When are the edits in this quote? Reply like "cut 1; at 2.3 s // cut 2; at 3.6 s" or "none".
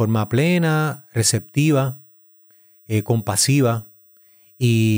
none